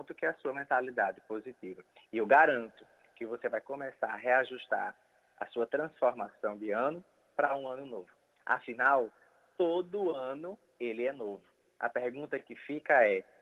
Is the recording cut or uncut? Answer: uncut